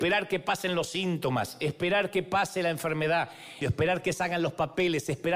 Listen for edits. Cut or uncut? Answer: cut